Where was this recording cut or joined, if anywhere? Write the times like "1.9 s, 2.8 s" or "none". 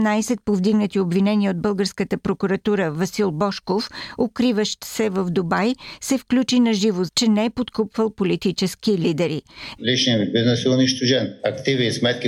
7.1 s, 9.8 s